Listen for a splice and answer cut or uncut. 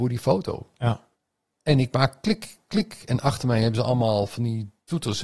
uncut